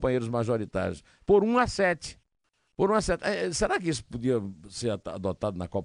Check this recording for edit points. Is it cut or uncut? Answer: uncut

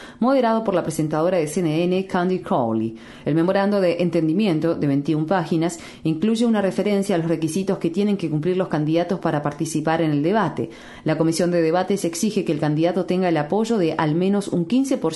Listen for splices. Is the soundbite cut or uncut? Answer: uncut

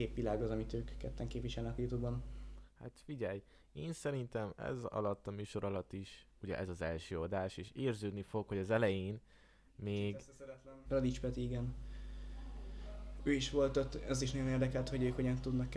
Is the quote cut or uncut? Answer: cut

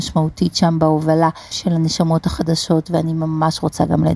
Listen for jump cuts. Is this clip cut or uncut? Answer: cut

